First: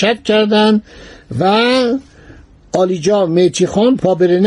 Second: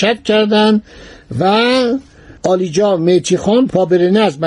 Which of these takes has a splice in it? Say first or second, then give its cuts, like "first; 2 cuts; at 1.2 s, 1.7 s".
second; 1 cut; at 2.4 s